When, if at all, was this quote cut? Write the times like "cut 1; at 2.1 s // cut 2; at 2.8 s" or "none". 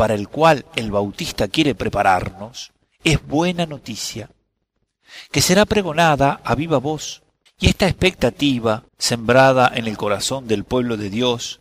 cut 1; at 7.5 s // cut 2; at 8.9 s

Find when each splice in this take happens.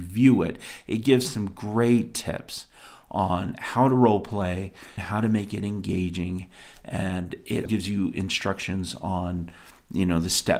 cut 1; at 5.0 s // cut 2; at 7.7 s

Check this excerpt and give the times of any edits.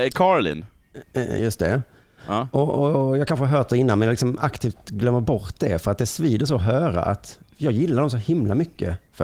none

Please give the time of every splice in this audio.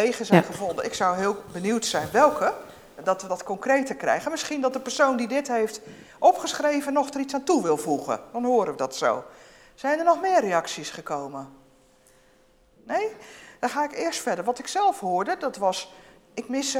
none

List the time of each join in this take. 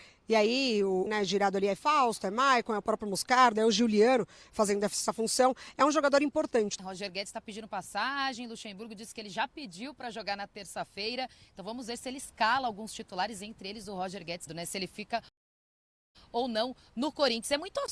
cut 1; at 1.1 s // cut 2; at 6.8 s // cut 3; at 14.5 s

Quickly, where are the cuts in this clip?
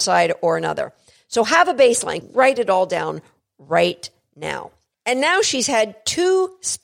cut 1; at 2.2 s // cut 2; at 4.9 s

